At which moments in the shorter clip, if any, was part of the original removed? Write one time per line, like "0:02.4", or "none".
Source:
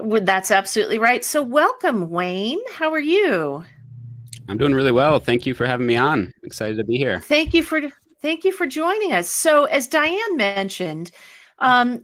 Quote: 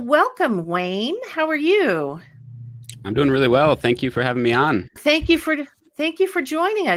0:05.0